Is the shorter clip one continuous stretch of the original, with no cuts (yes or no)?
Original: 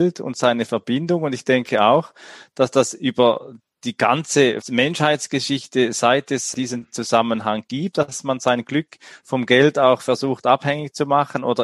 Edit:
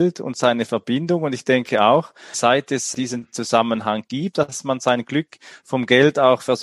no